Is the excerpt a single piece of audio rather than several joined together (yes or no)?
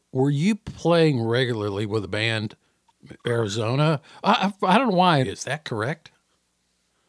no